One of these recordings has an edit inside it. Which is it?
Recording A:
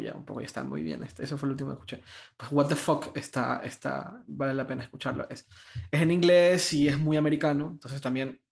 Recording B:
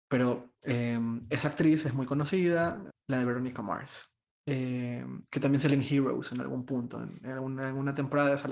B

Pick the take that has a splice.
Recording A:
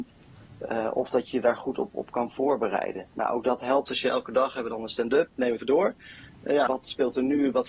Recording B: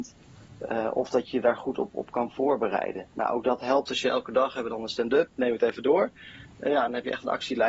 A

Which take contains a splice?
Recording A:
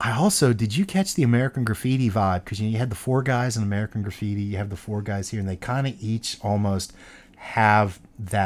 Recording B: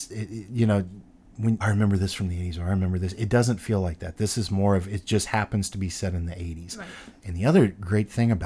B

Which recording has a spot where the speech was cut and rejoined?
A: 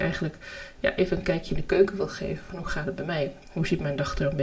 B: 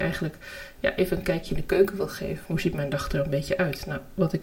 B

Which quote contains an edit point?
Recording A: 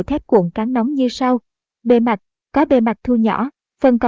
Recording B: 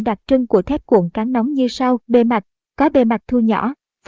B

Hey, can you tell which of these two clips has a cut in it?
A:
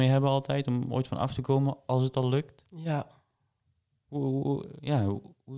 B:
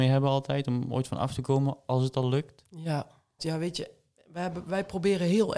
B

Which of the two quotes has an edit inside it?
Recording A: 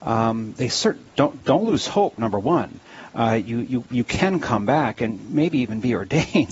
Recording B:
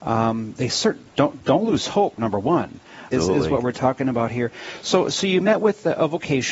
B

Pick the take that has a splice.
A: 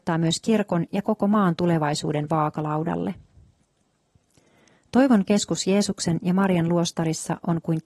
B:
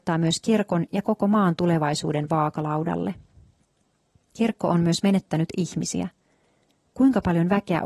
B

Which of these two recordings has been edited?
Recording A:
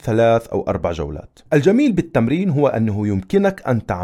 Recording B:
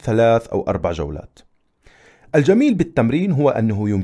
A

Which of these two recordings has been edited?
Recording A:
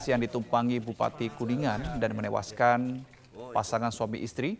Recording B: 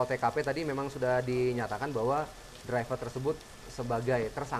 B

